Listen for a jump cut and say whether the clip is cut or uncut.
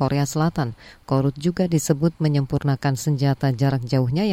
uncut